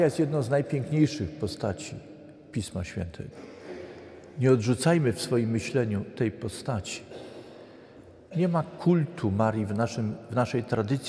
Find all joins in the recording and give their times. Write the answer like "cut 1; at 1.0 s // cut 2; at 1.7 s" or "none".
none